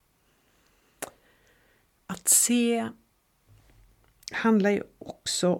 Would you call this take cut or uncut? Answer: uncut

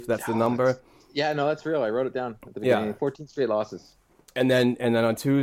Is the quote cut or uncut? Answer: uncut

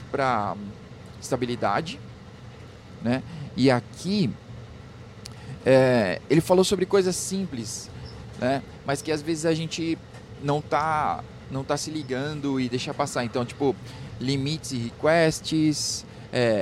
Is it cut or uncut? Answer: uncut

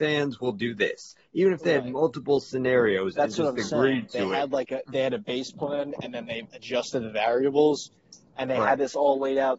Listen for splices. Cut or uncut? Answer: uncut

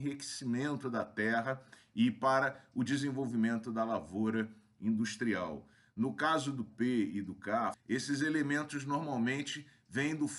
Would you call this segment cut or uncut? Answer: cut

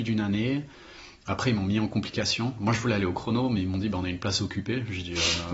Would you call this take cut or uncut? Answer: uncut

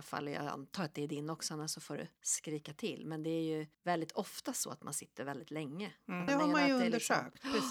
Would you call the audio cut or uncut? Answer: cut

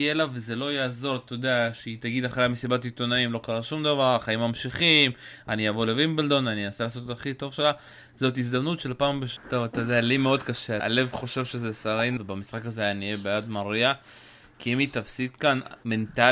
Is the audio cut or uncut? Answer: cut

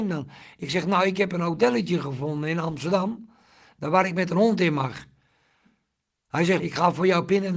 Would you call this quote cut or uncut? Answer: cut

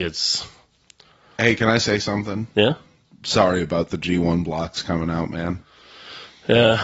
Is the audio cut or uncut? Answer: uncut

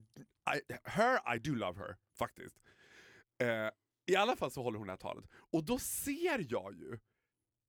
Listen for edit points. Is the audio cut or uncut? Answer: uncut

